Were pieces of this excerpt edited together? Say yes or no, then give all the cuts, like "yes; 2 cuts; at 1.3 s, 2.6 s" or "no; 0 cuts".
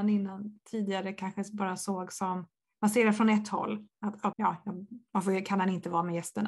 yes; 1 cut; at 4.3 s